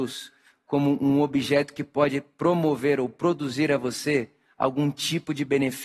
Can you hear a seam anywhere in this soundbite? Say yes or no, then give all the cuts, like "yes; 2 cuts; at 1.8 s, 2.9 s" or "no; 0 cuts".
no; 0 cuts